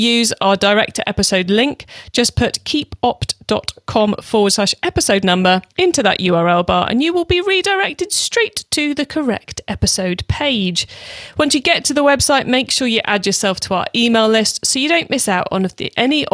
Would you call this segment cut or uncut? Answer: cut